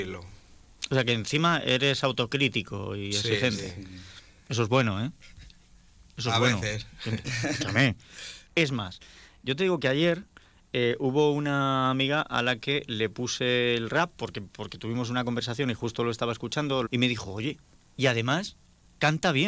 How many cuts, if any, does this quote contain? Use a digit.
2